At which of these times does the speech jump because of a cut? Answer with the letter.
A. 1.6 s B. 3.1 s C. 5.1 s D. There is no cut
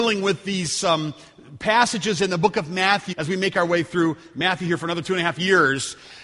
B